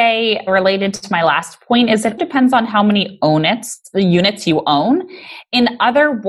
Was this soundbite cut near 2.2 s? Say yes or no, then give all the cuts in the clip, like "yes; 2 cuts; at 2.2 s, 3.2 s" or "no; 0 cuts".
yes; 1 cut; at 2.2 s